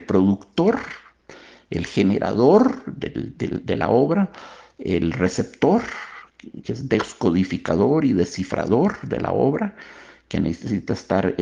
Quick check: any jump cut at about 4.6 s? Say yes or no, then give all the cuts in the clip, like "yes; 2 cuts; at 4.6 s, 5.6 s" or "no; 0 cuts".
no; 0 cuts